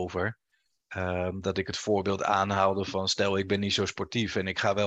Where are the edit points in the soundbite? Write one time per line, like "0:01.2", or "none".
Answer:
none